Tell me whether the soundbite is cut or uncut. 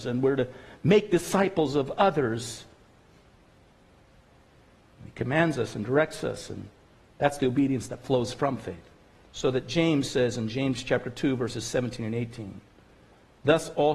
uncut